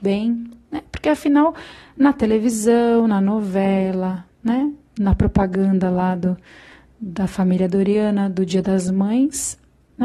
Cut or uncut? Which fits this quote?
uncut